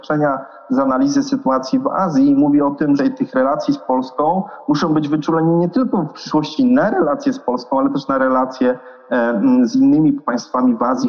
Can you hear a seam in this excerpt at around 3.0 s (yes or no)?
yes